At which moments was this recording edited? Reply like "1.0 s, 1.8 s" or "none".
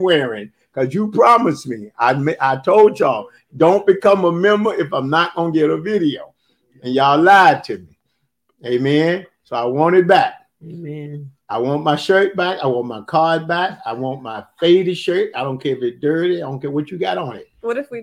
none

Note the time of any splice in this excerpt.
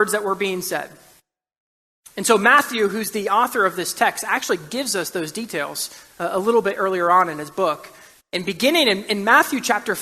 none

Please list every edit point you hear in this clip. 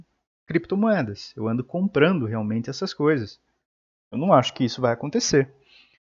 3.9 s

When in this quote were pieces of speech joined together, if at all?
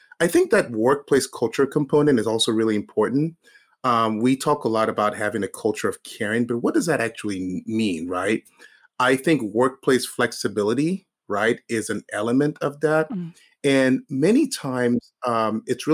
none

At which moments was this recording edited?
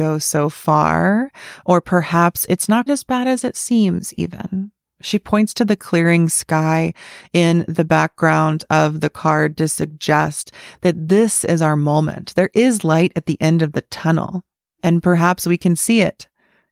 2.9 s

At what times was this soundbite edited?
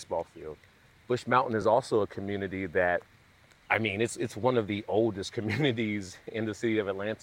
none

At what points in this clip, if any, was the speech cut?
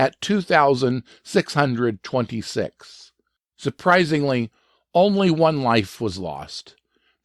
3.4 s

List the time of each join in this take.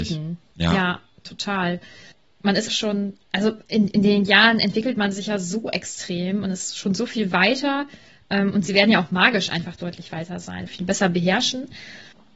2.7 s, 10.7 s

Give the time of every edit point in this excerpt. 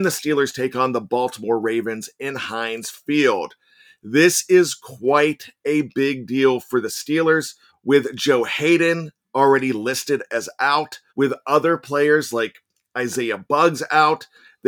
7.7 s, 11.1 s

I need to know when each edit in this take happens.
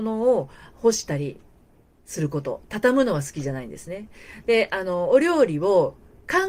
none

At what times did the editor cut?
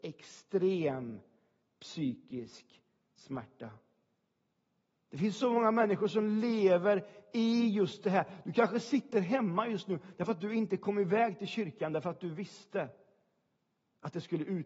5.0 s

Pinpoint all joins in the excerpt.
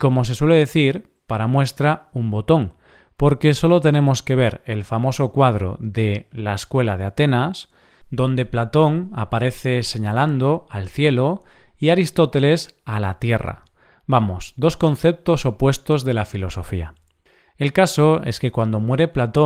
none

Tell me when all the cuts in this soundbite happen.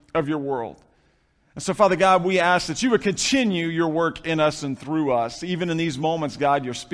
none

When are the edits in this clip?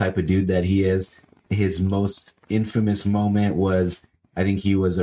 1.5 s

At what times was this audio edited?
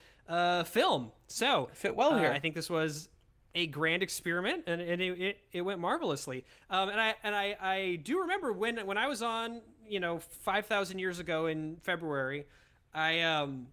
none

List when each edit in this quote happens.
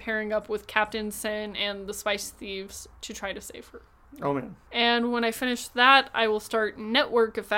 2.9 s

